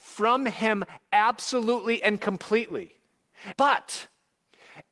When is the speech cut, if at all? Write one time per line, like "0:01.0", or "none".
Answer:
0:03.5